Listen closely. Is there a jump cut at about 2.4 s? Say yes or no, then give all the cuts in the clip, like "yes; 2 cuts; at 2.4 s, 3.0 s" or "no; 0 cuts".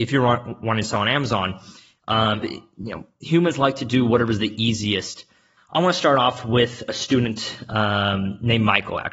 yes; 2 cuts; at 2.4 s, 5.6 s